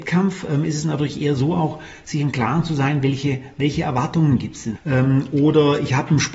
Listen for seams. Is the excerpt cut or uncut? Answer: cut